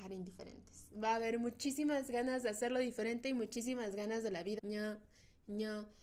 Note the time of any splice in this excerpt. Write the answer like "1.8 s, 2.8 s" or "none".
4.6 s